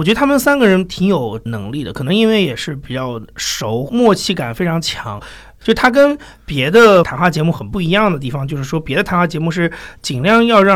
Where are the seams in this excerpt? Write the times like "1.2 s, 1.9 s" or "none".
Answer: none